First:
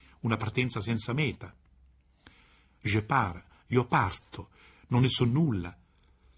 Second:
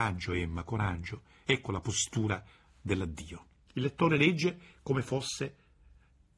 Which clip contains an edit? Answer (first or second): second